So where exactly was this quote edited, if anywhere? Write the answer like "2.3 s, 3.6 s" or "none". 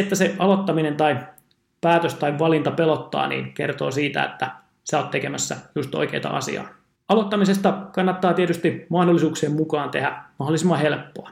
7.0 s